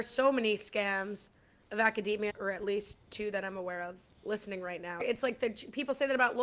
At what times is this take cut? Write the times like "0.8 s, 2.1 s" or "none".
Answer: 2.3 s, 5.0 s